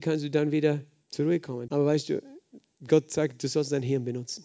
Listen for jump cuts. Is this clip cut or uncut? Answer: cut